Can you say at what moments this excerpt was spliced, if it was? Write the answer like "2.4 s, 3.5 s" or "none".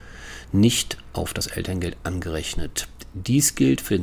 none